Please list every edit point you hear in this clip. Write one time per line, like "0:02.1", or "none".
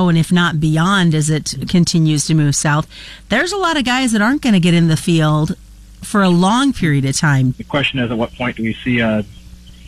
0:07.5